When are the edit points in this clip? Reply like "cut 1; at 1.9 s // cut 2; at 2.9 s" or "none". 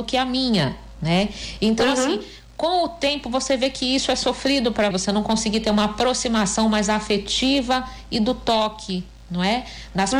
cut 1; at 4.9 s